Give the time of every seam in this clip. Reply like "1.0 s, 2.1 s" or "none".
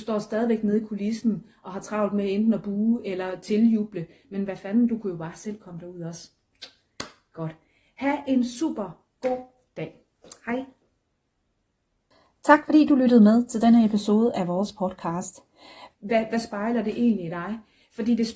15.9 s